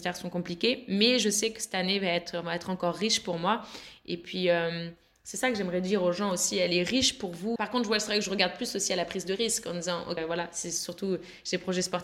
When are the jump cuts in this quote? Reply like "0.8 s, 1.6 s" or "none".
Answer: 7.6 s, 10.2 s